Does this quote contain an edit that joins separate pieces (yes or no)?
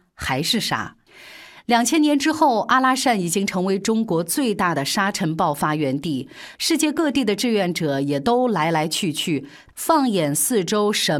yes